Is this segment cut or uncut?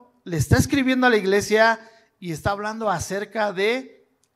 uncut